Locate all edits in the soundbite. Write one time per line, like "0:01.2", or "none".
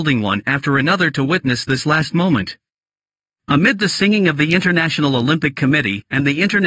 none

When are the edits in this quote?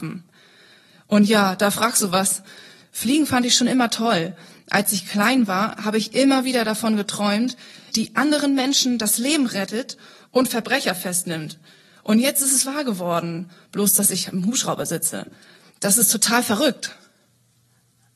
0:07.9

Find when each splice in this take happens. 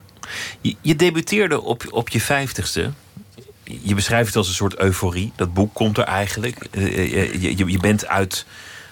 none

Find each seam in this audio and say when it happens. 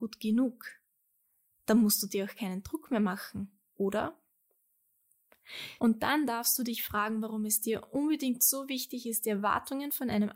0:05.8

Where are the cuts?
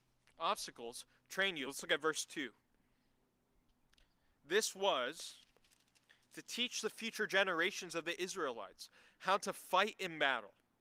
none

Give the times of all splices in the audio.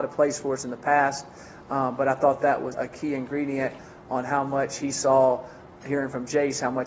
0:02.7

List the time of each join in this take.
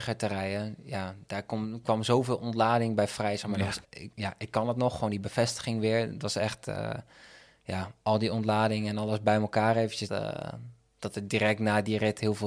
0:03.8
0:10.1

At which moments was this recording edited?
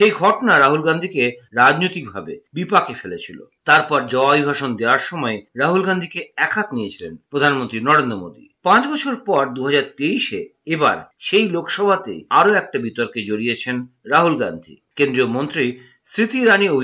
0:12.3

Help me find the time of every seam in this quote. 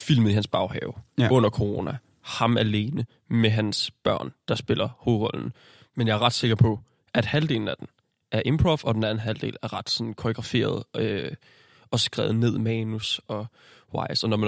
none

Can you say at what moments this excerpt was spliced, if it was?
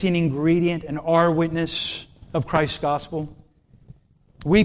none

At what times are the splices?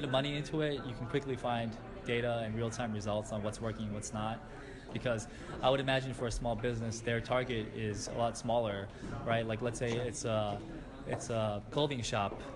0:04.9

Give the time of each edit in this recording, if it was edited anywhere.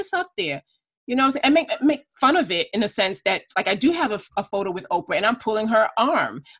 0:01.4

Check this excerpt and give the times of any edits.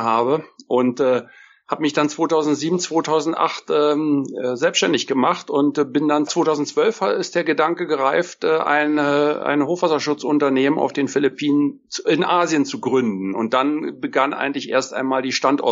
none

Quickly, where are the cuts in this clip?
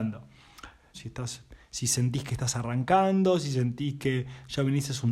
0:00.9

